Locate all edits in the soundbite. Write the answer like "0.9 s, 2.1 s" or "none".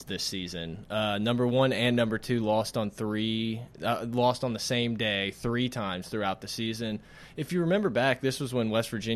none